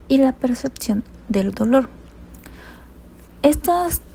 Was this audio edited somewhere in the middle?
no; 0 cuts

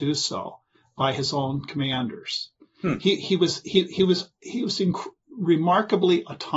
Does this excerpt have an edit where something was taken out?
no; 0 cuts

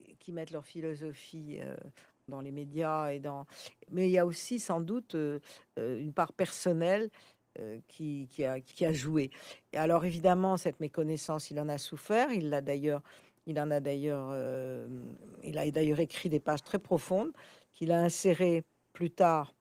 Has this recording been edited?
yes; 2 cuts; at 2.3 s, 8.7 s

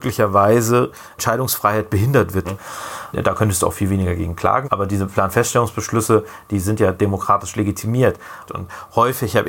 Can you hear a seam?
yes; 3 cuts; at 2.4 s, 4.6 s, 8.4 s

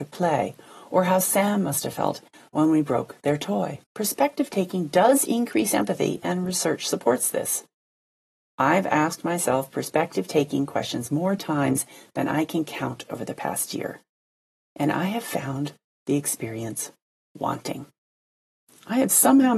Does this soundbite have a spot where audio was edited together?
yes; 1 cut; at 3.8 s

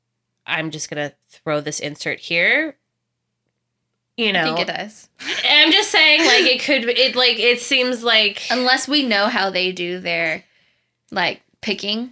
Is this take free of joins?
yes; 0 cuts

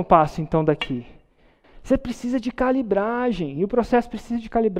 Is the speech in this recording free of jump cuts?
no; 1 cut; at 1.6 s

